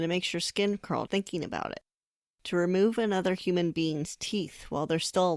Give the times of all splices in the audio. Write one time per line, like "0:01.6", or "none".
0:01.1

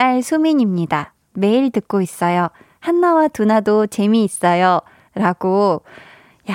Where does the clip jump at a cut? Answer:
none

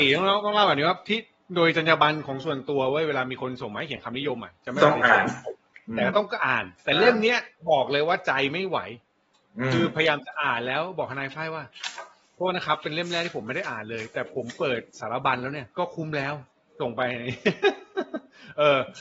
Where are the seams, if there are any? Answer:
0:06.7
0:15.7

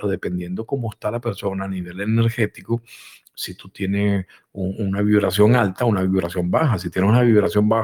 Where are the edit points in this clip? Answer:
none

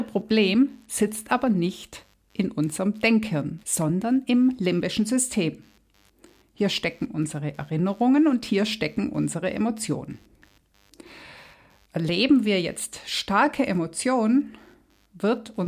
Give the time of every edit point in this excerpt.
0:03.6

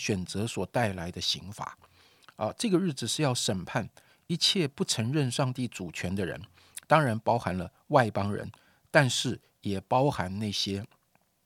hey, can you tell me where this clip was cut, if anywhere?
none

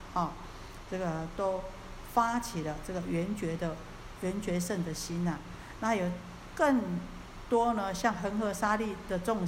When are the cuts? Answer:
none

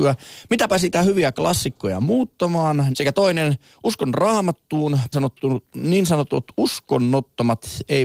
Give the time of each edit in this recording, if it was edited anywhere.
0:02.9
0:05.1

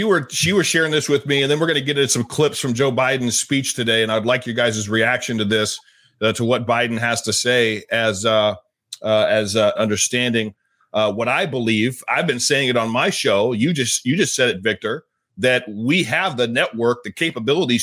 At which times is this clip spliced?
0:09.7

